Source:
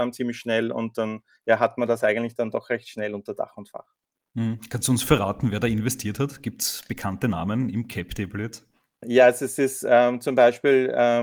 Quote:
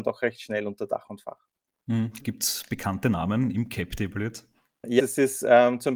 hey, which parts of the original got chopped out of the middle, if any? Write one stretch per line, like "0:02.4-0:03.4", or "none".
0:04.7-0:06.4
0:09.2-0:09.4